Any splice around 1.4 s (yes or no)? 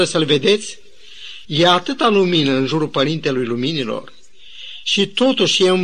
yes